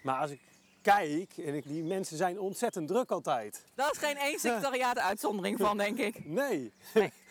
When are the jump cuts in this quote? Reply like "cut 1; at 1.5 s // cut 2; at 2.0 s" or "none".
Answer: cut 1; at 1.6 s // cut 2; at 3.8 s